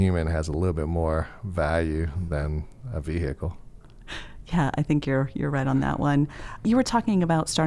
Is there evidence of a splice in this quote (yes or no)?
no